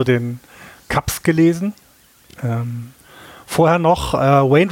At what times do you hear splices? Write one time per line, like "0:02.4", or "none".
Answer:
none